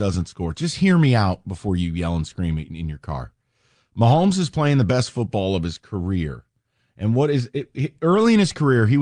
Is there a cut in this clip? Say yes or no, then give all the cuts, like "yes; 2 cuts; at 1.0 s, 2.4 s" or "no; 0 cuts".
no; 0 cuts